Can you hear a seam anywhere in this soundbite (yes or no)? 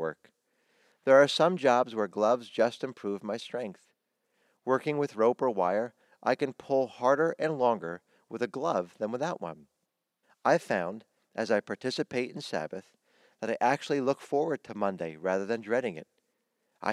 yes